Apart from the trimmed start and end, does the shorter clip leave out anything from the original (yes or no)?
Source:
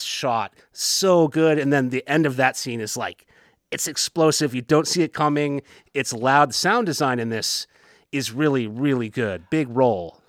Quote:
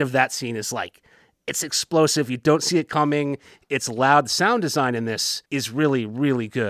yes